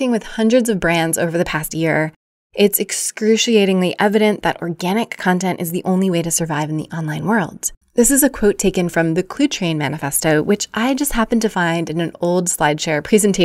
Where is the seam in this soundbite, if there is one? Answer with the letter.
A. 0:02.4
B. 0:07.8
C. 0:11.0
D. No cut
B